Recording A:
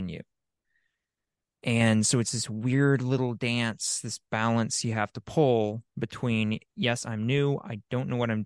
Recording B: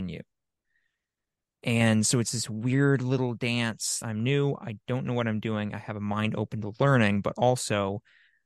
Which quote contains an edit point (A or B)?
B